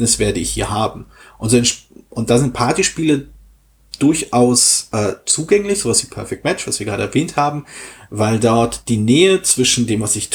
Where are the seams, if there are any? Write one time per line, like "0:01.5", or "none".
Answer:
none